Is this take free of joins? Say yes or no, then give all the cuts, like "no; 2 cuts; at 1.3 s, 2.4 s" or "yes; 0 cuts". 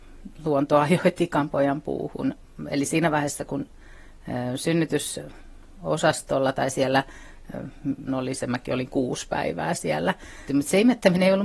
no; 2 cuts; at 8.1 s, 10.5 s